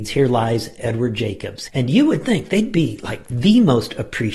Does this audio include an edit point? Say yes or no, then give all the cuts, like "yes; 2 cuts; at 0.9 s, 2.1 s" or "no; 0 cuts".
yes; 1 cut; at 1.7 s